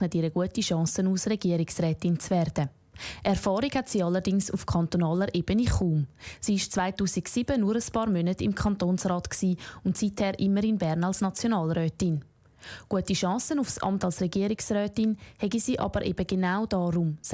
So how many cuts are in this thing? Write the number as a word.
zero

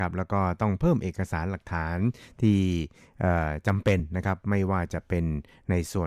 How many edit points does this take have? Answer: zero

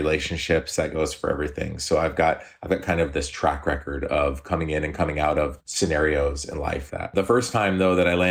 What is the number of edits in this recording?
one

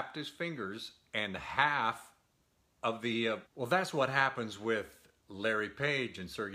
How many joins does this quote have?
one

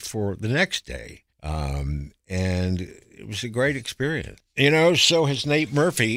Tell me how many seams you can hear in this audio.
two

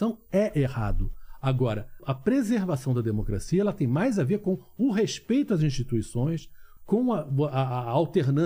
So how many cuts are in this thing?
two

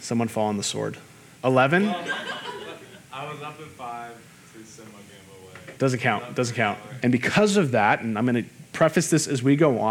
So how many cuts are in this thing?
three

